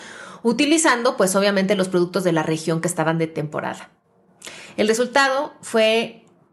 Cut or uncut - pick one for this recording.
uncut